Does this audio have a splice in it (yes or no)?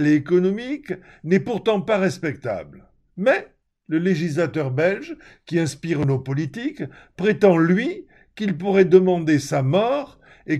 no